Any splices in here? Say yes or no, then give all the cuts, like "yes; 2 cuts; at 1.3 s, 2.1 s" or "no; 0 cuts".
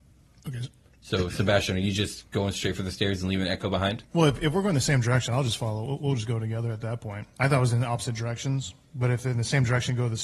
no; 0 cuts